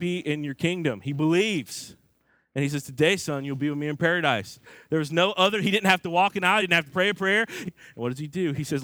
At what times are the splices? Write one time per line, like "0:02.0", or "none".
0:06.6
0:07.6